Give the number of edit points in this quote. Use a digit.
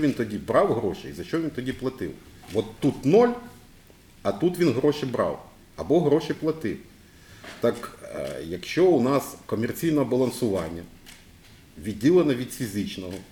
1